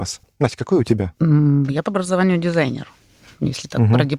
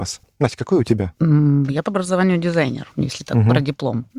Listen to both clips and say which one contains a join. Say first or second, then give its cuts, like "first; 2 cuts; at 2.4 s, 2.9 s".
second; 1 cut; at 2.9 s